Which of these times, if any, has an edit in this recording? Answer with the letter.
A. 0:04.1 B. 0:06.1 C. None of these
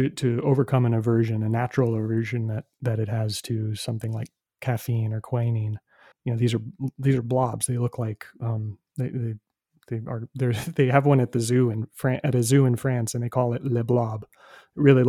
B